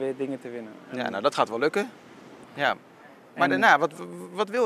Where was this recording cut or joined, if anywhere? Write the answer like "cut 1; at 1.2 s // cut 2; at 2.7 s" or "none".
cut 1; at 2.4 s

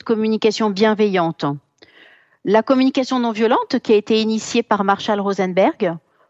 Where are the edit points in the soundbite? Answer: none

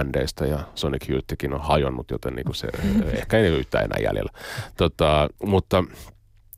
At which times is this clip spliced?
cut 1; at 5.4 s

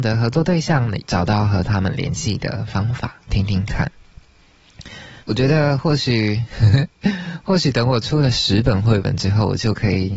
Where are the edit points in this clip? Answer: cut 1; at 1.0 s // cut 2; at 3.3 s // cut 3; at 5.2 s

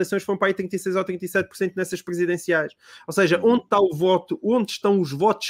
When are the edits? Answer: none

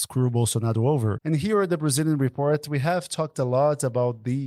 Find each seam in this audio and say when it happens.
cut 1; at 1.2 s

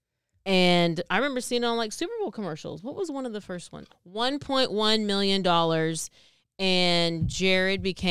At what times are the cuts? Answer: cut 1; at 3.9 s

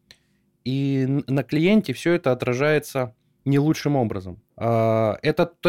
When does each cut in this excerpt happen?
cut 1; at 4.5 s

